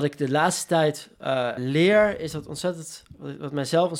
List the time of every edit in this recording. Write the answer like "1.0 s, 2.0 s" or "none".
1.6 s